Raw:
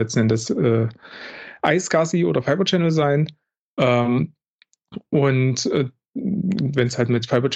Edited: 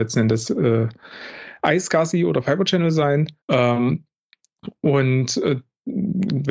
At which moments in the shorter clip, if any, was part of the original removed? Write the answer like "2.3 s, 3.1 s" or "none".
3.4 s